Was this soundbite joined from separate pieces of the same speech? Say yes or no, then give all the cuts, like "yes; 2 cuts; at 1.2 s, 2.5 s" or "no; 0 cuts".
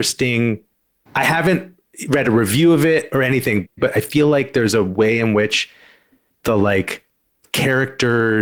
no; 0 cuts